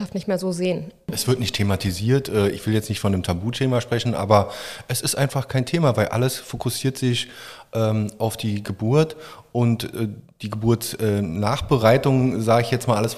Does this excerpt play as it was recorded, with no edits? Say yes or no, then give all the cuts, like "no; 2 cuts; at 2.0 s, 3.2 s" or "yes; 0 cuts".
yes; 0 cuts